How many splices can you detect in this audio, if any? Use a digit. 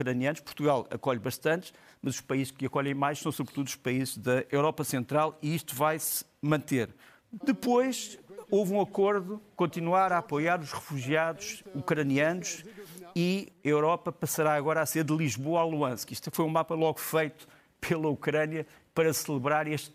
2